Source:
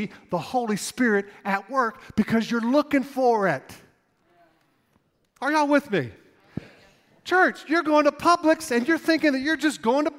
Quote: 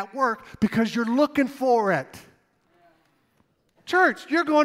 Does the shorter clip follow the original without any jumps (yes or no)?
no